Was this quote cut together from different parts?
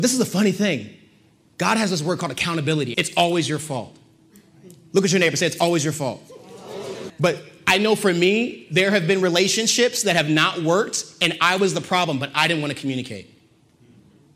yes; 2 cuts; at 2.9 s, 7.1 s

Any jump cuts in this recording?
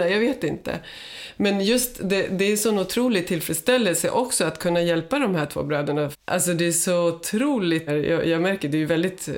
yes; 2 cuts; at 6.1 s, 7.9 s

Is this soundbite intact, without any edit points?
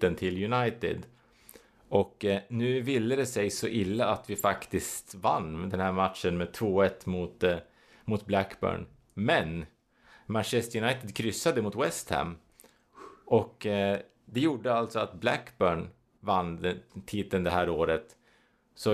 yes; 0 cuts

